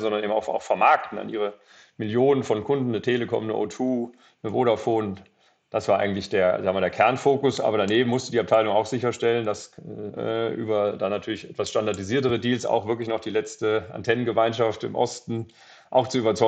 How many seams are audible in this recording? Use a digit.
1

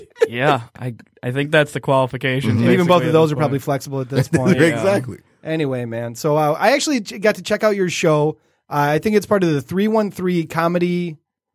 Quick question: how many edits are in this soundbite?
0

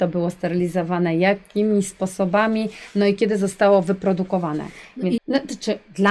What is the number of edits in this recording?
1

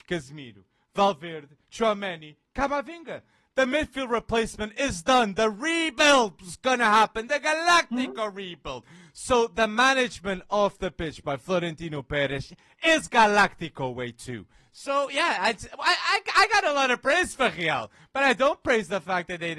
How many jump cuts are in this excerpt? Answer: 0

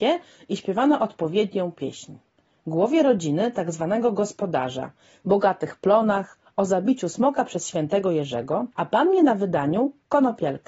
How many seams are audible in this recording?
2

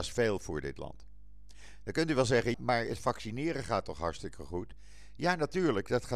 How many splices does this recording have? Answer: 1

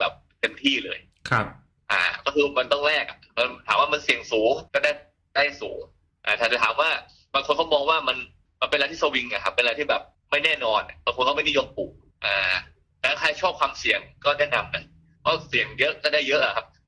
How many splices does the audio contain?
1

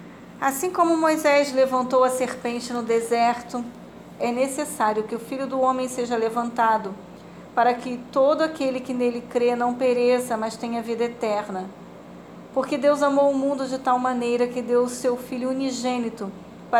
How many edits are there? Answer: 1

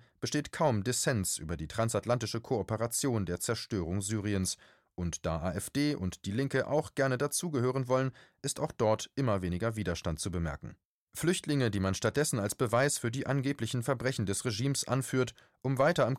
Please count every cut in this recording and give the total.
1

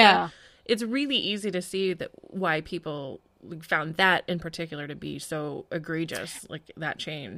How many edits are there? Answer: 0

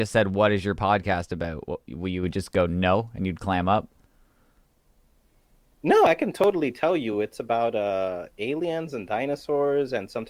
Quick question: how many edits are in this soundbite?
0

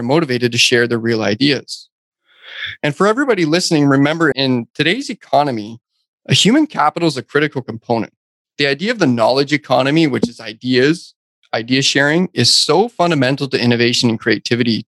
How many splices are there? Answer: 1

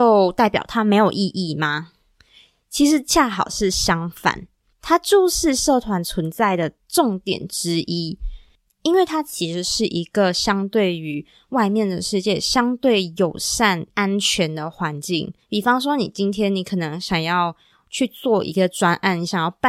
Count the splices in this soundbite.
2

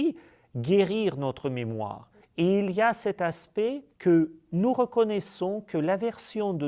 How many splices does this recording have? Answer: 2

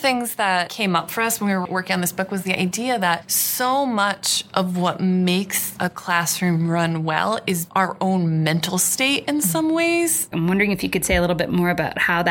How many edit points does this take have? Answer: 1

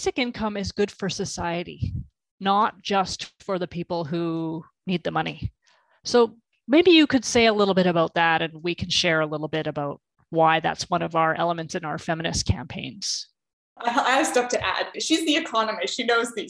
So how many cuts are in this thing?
2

